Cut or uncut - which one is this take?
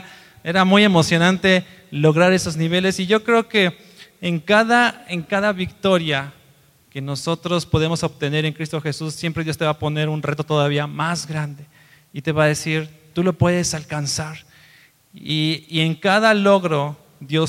uncut